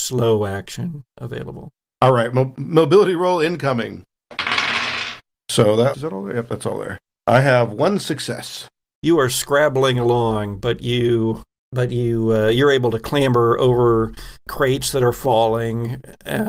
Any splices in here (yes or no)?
yes